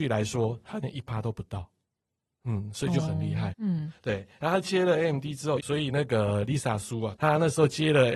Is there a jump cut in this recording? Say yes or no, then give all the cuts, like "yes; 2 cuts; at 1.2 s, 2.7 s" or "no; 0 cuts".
yes; 3 cuts; at 3.5 s, 5.6 s, 7.2 s